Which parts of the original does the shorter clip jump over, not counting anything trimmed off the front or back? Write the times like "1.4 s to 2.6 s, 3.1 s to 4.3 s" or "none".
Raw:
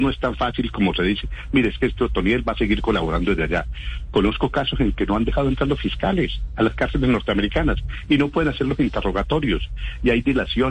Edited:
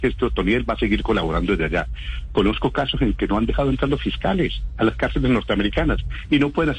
none

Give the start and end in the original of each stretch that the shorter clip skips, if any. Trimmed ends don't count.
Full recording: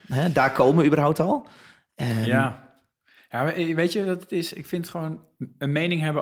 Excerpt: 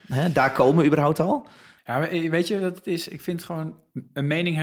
1.8 s to 3.2 s

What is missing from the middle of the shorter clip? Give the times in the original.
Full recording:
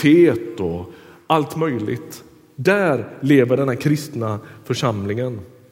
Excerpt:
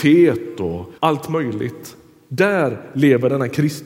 1.0 s to 1.2 s

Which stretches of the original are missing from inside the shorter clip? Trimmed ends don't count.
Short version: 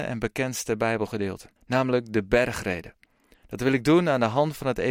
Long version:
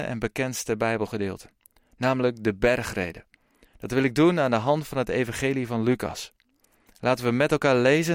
1.6 s to 1.9 s

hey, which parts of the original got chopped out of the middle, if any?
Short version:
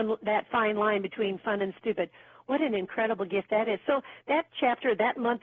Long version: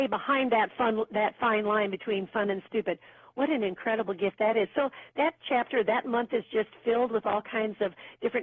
none

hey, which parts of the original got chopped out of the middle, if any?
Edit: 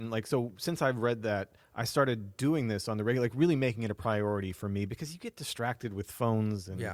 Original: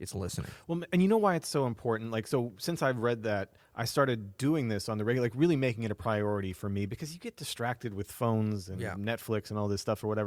none

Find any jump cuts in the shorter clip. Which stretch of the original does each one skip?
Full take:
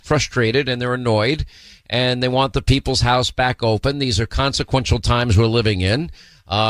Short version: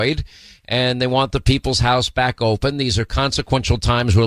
none

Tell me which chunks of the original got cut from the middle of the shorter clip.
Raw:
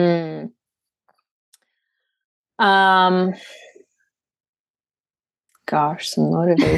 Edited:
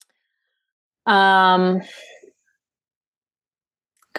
none

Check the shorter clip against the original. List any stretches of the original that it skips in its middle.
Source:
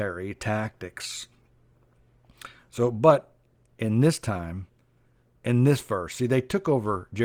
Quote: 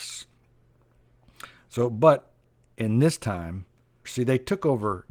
5.1 s to 6.1 s

